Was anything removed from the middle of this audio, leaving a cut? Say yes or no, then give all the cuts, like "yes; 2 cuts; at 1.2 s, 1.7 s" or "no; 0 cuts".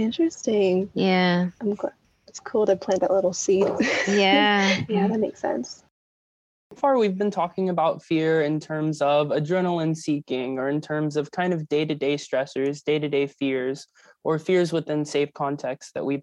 yes; 2 cuts; at 4.9 s, 6.8 s